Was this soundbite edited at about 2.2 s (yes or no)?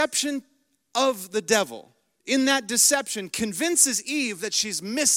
yes